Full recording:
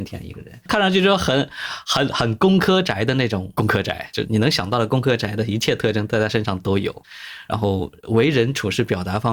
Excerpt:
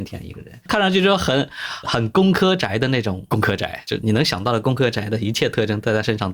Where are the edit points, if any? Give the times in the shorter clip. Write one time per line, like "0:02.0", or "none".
0:01.8